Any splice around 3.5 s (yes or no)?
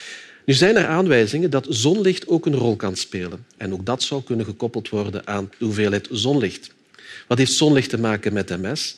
yes